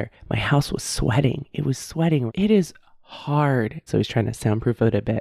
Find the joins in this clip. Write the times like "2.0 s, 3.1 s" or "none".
2.3 s, 3.9 s